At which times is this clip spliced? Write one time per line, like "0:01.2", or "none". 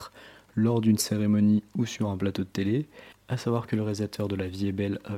0:03.1